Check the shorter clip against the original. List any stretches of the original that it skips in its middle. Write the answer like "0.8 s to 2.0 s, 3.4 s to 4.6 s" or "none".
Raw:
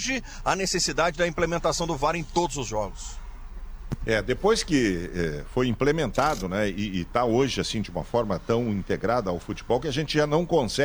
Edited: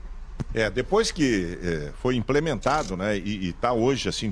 none